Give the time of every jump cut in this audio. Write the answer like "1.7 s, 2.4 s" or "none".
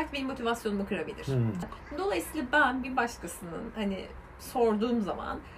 1.6 s